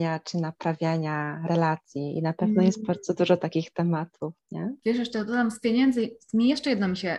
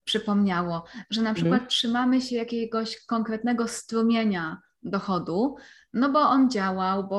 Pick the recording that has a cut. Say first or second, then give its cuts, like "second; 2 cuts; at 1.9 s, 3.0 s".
first; 1 cut; at 4.8 s